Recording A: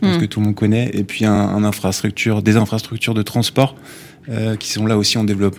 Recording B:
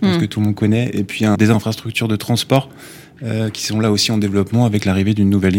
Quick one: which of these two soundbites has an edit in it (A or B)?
B